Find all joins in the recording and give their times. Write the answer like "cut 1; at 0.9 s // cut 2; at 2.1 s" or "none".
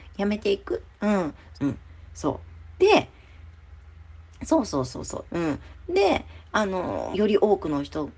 cut 1; at 1.5 s // cut 2; at 5.3 s // cut 3; at 7.1 s